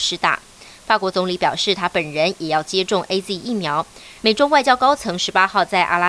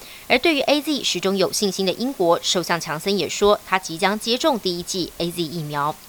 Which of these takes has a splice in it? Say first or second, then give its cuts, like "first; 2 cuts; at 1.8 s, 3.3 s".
first; 1 cut; at 4.2 s